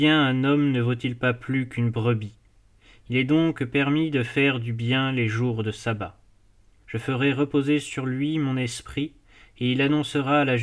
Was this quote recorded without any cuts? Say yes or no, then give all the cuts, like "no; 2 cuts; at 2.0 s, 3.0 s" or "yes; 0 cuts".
no; 1 cut; at 6.8 s